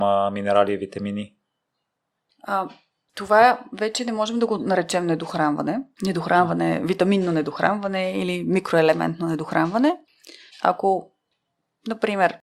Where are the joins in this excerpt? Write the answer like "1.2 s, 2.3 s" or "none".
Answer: 5.9 s, 10.5 s